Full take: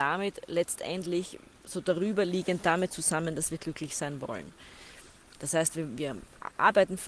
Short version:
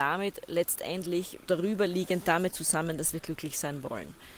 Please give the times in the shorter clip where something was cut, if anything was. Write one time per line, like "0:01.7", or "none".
0:01.5